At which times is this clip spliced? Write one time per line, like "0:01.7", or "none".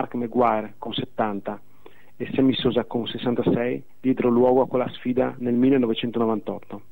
none